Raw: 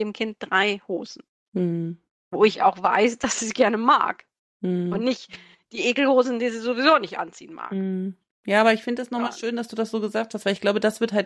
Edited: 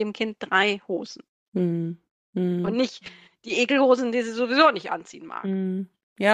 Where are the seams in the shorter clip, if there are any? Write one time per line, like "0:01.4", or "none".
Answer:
0:02.2